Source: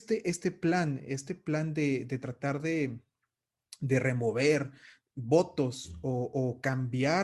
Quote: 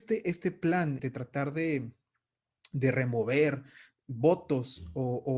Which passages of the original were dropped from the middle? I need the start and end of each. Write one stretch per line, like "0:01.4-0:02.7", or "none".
0:01.0-0:02.1